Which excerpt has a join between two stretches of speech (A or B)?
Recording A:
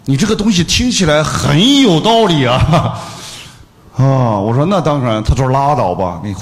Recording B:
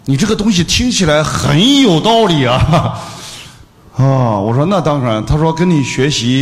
A